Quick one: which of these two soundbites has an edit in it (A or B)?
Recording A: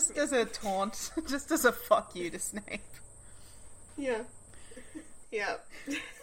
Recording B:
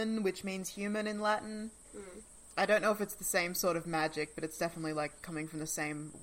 A